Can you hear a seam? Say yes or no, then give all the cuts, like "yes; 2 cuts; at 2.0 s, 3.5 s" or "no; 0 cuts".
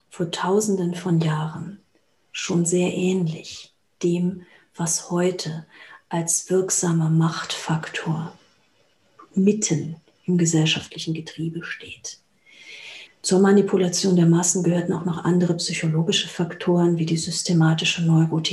yes; 1 cut; at 13.1 s